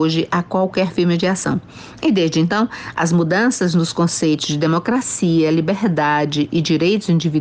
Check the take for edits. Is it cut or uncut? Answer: uncut